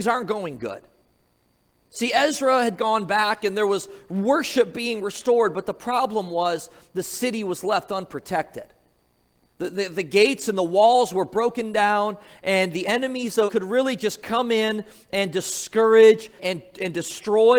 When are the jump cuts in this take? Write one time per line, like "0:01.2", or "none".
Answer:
0:13.5
0:16.4